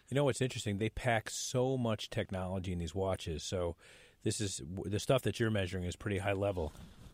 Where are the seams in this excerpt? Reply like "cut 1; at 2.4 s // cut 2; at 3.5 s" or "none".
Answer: none